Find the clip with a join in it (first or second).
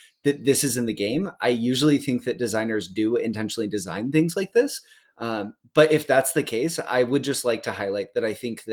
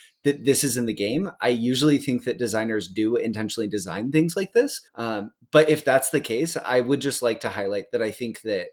second